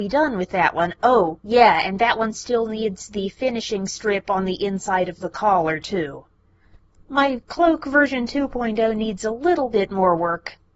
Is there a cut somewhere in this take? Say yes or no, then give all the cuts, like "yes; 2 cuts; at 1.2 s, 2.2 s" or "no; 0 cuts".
no; 0 cuts